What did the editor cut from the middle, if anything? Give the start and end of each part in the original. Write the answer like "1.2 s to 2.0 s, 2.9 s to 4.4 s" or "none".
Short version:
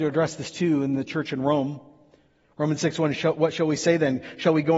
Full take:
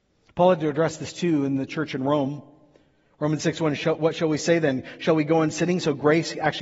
none

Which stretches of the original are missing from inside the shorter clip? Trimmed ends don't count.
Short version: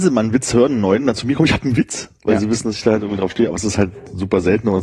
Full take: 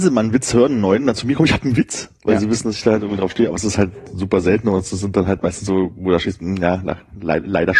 none

